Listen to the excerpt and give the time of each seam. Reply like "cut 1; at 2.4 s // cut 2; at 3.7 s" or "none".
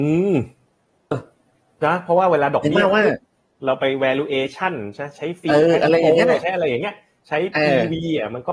cut 1; at 1.1 s